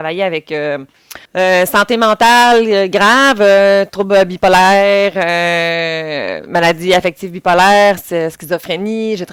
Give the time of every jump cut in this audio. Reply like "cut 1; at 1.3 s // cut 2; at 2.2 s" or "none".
cut 1; at 1.3 s